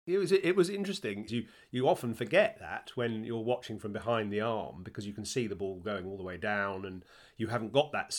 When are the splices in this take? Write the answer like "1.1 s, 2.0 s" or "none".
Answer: 1.3 s